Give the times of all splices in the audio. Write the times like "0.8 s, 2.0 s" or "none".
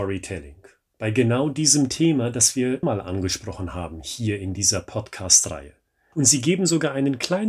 2.8 s, 6.1 s